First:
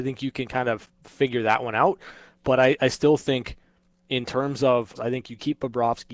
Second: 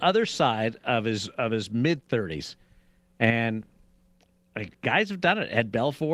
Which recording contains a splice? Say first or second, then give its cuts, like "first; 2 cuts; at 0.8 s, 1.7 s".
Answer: first; 1 cut; at 5.0 s